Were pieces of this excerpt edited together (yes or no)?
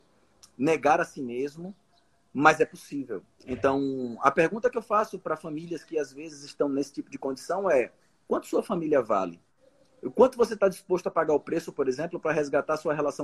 no